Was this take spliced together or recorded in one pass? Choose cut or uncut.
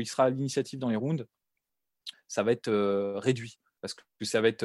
cut